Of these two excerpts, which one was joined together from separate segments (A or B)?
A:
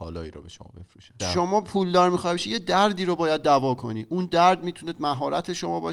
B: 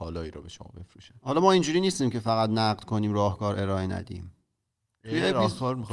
A